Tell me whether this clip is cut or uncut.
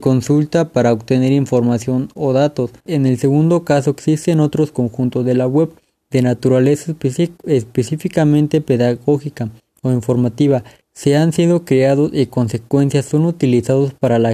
cut